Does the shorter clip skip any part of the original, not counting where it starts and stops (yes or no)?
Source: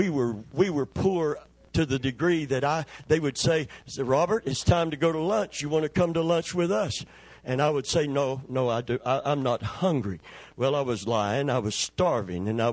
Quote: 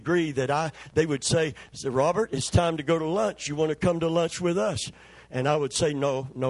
no